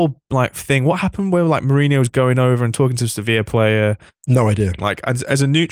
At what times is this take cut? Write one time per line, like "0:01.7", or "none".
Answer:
0:04.8